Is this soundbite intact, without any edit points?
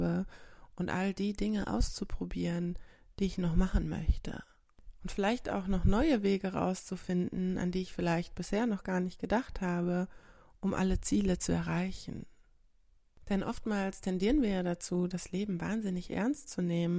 yes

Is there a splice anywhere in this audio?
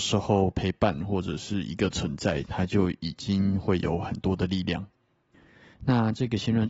yes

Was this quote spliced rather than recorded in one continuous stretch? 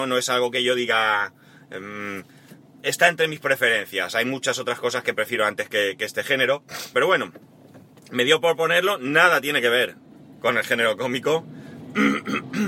yes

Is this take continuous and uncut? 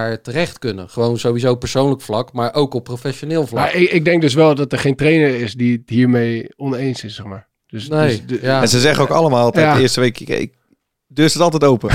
yes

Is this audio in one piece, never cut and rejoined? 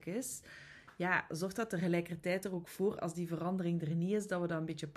yes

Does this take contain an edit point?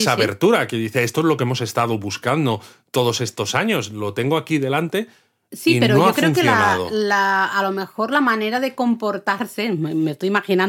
no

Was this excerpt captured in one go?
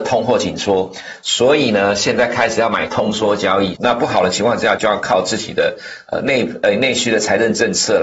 no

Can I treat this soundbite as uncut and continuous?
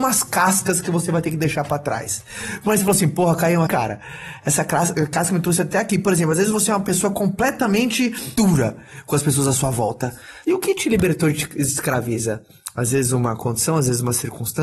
no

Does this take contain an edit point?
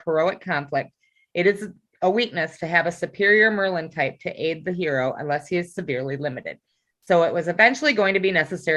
no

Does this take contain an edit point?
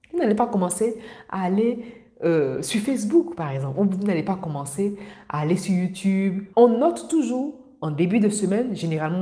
yes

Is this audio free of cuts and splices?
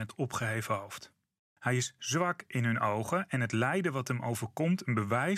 no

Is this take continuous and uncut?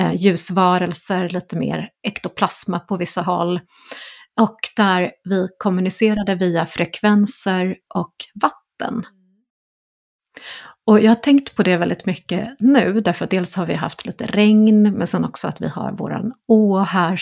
yes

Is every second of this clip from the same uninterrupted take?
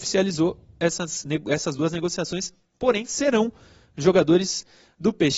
yes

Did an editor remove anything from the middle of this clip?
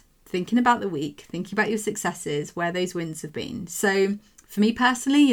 no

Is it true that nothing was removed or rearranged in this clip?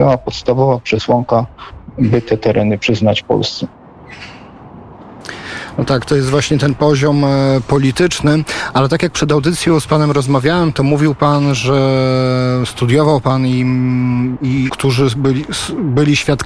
no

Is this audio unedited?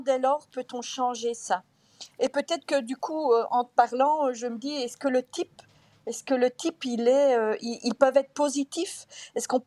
yes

